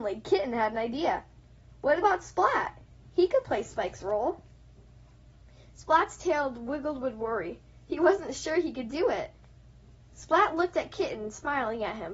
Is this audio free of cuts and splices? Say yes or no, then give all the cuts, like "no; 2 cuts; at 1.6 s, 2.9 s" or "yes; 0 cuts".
yes; 0 cuts